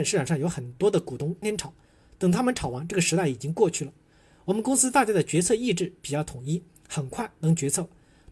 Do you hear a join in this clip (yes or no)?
yes